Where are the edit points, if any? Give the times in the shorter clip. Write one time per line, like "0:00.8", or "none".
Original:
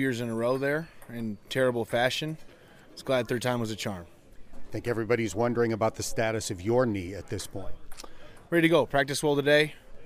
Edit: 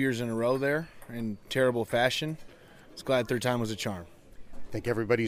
none